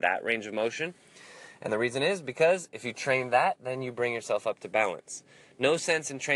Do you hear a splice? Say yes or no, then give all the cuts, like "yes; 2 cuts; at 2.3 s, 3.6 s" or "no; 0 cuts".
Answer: no; 0 cuts